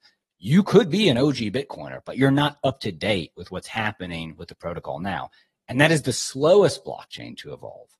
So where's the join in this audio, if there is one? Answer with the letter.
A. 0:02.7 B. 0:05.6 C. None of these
C